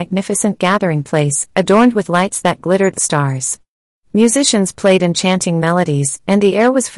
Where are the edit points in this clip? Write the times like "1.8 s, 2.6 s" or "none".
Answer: 2.9 s

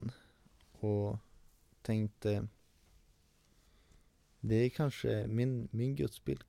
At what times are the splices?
none

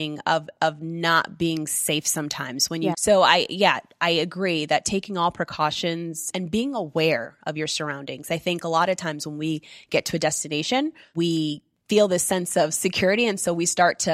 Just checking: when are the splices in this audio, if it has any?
2.9 s, 6.3 s

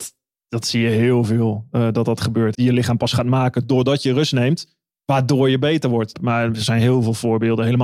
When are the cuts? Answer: 2.5 s, 4.9 s, 6.1 s

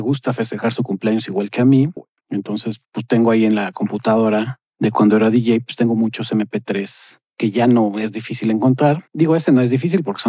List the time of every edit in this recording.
2.0 s

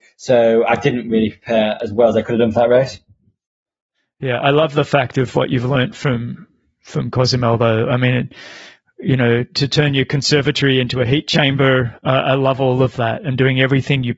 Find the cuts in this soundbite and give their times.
none

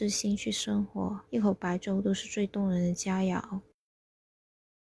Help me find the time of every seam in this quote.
1.3 s

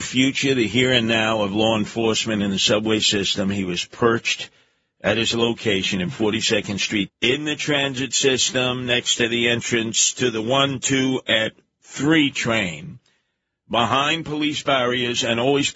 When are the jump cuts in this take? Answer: 7.1 s

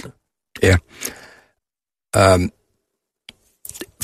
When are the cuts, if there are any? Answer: none

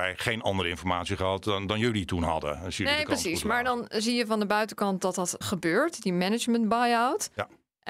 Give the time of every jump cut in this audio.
5.4 s

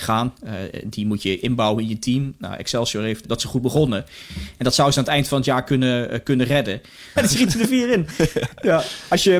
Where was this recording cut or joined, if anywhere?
3.2 s, 7.2 s

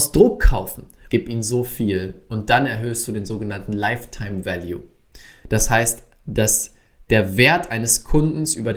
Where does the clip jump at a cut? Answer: 1.1 s

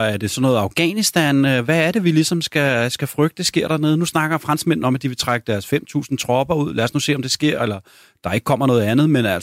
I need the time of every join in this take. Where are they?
none

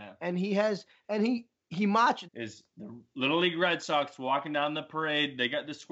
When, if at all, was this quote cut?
2.2 s

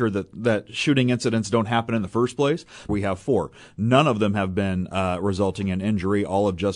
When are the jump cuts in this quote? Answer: 2.9 s

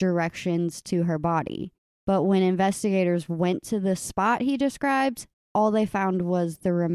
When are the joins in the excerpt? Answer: none

